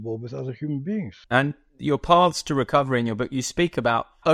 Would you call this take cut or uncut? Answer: cut